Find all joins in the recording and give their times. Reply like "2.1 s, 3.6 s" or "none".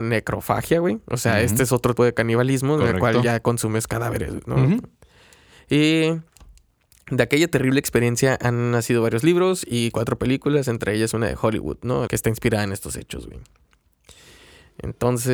2.0 s, 12.1 s